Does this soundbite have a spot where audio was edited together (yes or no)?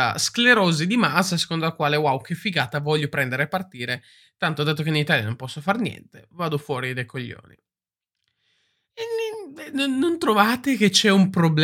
no